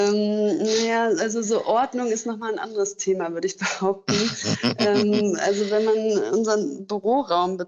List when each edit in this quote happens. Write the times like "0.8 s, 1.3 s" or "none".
none

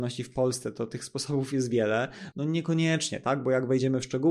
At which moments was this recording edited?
2.3 s

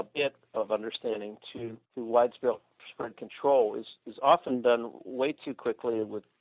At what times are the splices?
1.8 s

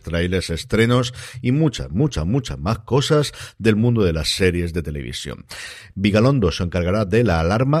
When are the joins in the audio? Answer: 5.9 s

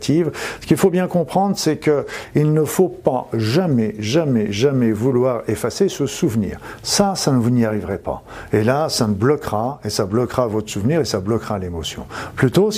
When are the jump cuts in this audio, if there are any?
none

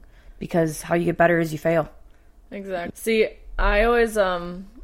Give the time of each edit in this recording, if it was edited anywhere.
2.9 s

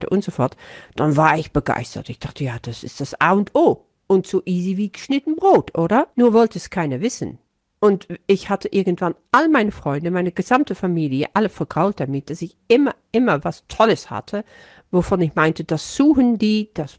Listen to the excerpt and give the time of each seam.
6.1 s

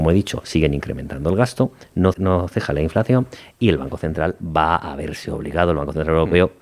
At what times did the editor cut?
2.1 s

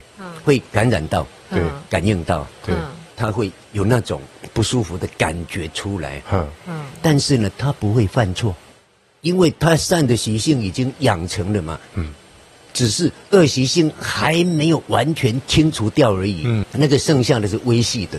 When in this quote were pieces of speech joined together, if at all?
none

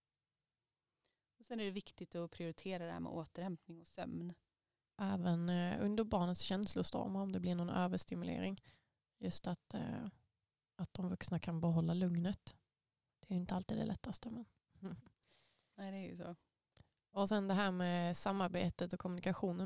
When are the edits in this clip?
4.9 s

